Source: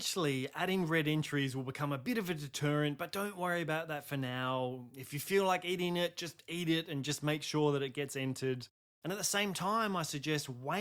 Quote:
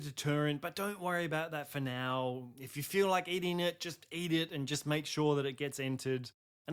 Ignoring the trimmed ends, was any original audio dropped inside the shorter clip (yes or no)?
no